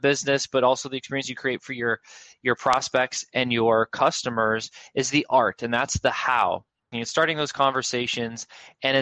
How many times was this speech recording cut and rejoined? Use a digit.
1